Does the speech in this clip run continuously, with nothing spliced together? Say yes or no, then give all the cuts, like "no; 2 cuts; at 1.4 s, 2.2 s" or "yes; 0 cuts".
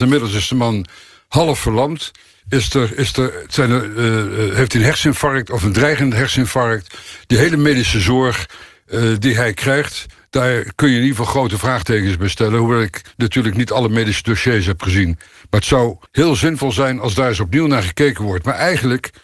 no; 1 cut; at 16.1 s